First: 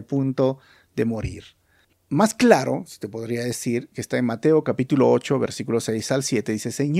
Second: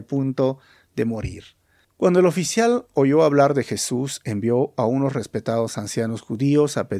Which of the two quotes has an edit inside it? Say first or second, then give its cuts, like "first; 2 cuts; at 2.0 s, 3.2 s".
first; 1 cut; at 1.9 s